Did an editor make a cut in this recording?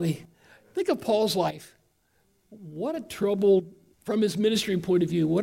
yes; 1 cut; at 3.9 s

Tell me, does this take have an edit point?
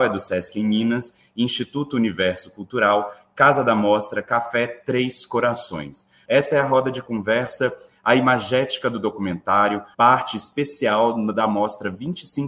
yes; 2 cuts; at 6.2 s, 9.9 s

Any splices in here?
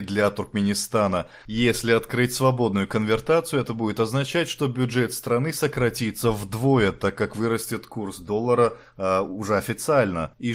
yes; 1 cut; at 1.4 s

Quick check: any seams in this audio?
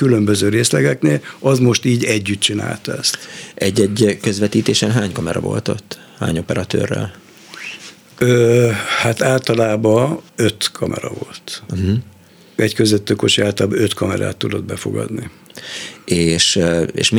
yes; 1 cut; at 10.3 s

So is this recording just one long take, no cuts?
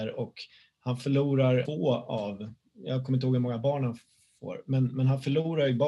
no; 1 cut; at 1.6 s

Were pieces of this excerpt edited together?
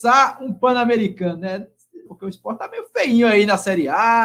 yes; 1 cut; at 2.1 s

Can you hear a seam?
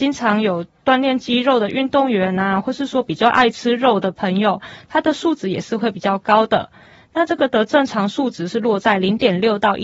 no; 0 cuts

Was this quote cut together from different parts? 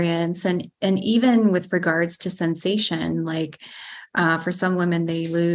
no; 0 cuts

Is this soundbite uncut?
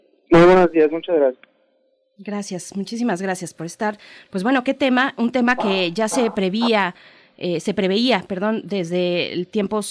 yes; 0 cuts

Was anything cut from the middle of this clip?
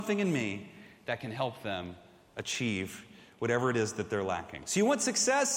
no; 0 cuts

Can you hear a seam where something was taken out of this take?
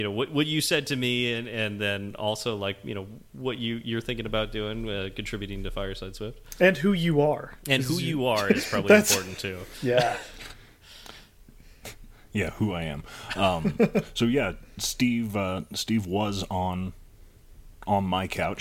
no; 0 cuts

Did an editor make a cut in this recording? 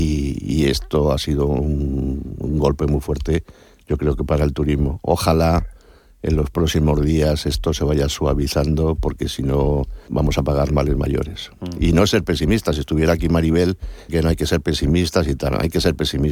yes; 2 cuts; at 10.1 s, 14.1 s

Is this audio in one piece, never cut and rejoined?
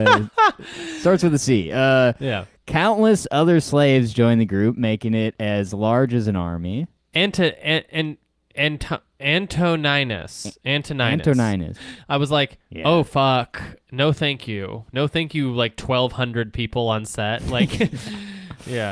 no; 2 cuts; at 7.1 s, 11.8 s

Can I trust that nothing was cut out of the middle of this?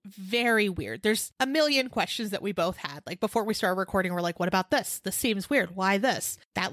yes; 0 cuts

